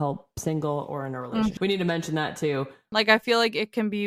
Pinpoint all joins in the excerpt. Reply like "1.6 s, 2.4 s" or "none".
1.6 s, 2.9 s